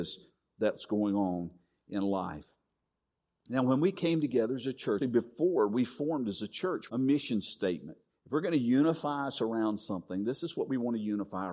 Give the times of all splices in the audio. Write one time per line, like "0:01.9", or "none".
0:05.0
0:06.9
0:08.1